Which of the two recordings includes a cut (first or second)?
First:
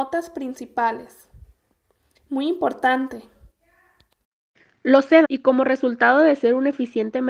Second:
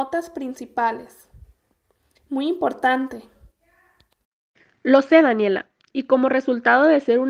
first